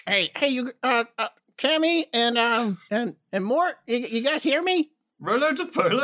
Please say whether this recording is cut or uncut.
uncut